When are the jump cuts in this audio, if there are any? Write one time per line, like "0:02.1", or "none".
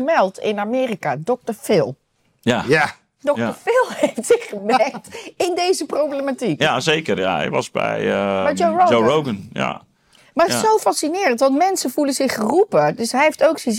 none